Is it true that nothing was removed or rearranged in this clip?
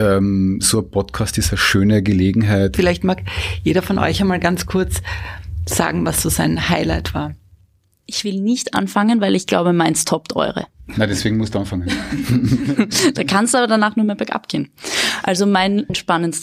no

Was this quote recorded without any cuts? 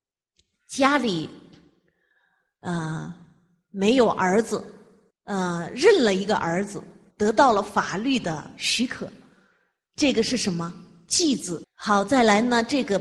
no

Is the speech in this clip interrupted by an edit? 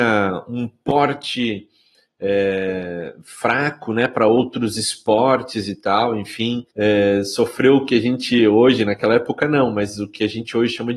yes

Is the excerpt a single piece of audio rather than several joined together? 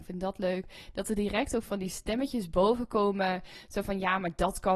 yes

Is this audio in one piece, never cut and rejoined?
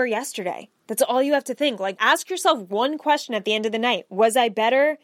no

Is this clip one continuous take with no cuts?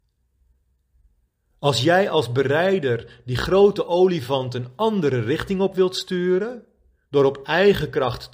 yes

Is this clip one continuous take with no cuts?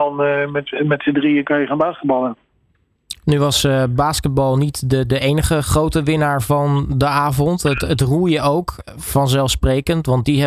yes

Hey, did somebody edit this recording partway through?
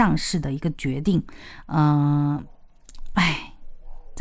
no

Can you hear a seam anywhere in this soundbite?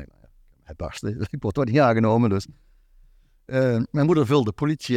no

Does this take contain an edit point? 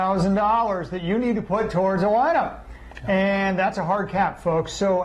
no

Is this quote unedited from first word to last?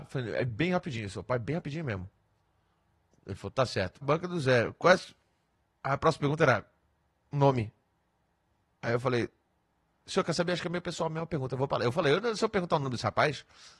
no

